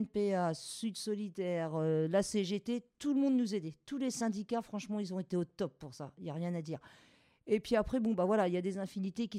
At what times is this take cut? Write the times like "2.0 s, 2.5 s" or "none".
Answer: none